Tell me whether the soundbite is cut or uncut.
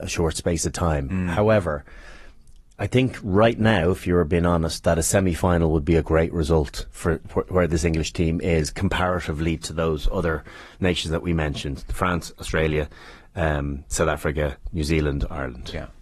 uncut